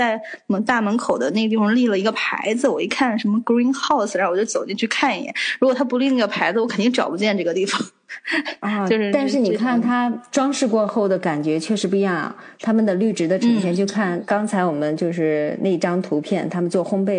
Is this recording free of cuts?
yes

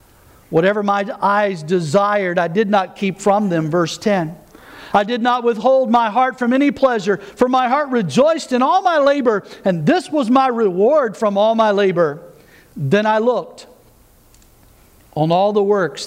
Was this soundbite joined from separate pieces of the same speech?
no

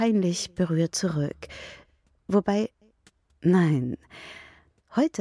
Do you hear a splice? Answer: yes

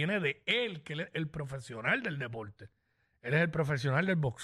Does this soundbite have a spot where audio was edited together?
no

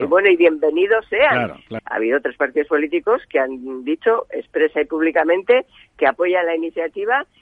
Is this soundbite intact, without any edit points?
no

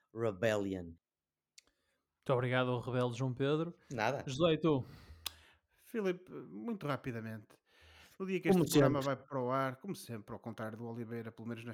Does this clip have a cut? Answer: no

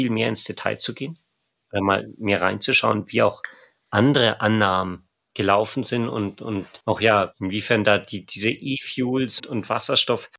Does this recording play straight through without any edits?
no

